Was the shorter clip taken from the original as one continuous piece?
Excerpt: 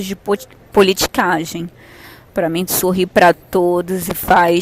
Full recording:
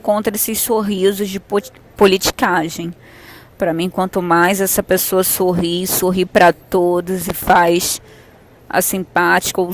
no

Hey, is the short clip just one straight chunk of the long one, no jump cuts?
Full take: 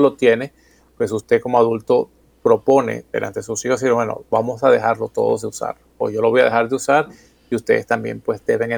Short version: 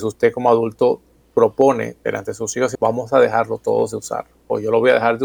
no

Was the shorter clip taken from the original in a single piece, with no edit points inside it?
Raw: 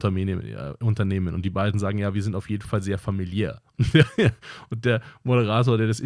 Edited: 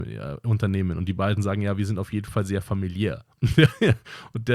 yes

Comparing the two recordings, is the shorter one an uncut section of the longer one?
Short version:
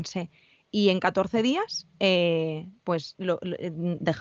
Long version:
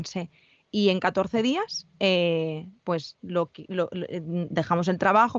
no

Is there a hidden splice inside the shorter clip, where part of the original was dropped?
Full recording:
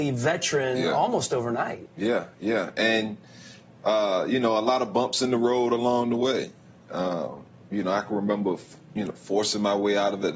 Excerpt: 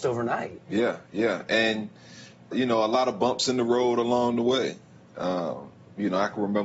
yes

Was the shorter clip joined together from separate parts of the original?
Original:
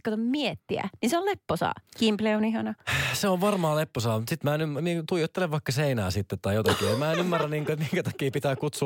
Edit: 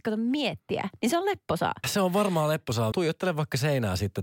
yes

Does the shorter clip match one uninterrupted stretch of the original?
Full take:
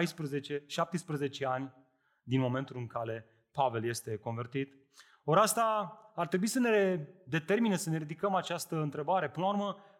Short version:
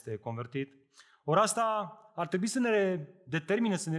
yes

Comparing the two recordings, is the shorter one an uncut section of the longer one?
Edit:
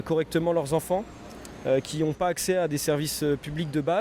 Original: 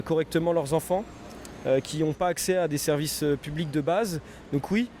yes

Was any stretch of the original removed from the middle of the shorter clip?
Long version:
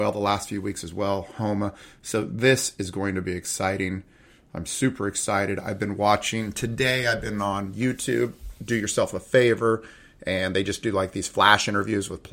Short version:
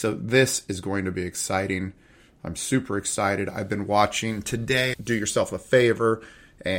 yes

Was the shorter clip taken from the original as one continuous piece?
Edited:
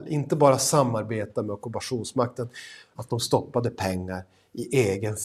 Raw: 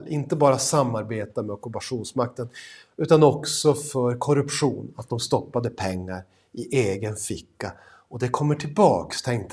no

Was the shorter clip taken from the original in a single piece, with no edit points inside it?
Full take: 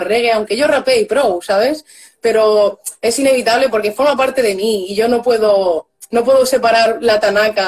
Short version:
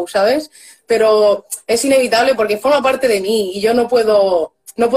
yes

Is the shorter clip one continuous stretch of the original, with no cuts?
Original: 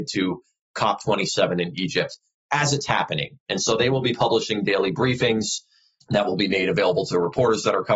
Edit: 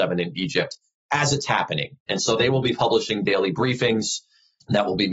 yes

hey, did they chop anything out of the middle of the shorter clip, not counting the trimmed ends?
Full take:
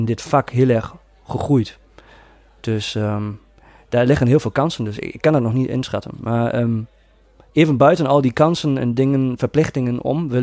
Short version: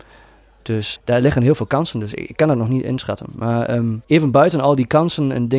yes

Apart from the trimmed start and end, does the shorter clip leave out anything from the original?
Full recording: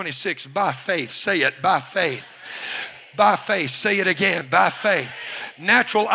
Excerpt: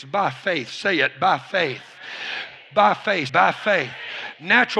yes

